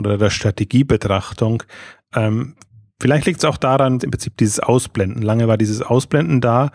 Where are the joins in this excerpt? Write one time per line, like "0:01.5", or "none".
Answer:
0:04.0